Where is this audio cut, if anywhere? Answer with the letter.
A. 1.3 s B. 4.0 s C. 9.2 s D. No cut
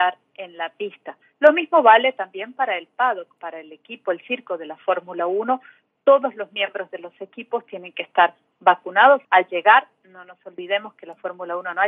C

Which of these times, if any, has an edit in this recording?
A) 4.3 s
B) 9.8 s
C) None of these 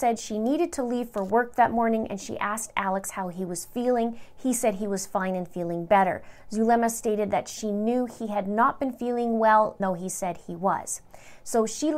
B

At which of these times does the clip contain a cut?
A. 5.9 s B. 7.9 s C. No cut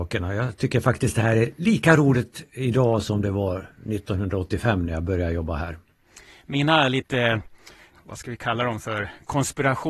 B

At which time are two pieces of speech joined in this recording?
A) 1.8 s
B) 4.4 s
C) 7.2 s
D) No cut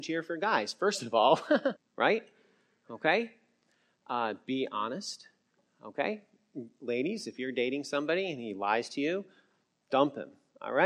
A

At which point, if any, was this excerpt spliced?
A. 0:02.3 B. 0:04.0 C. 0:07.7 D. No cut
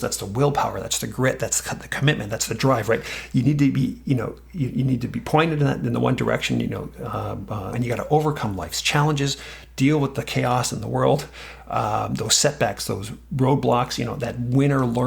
C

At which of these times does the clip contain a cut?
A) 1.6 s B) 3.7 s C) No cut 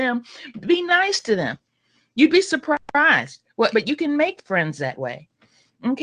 B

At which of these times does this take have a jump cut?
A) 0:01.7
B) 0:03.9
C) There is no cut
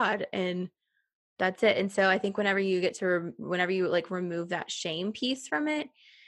C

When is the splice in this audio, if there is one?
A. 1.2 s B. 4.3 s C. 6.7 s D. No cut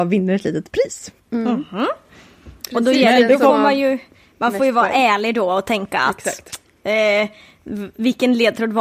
A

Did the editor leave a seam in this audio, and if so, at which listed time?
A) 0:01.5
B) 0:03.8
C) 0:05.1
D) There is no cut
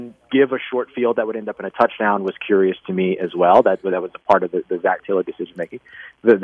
B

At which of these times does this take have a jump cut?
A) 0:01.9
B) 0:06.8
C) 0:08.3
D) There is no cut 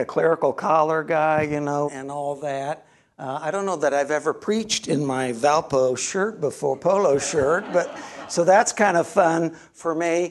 A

